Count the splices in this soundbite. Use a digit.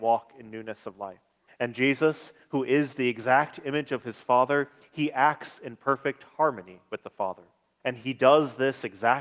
2